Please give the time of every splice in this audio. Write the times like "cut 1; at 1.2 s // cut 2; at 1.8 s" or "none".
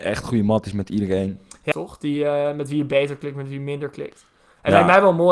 cut 1; at 1.7 s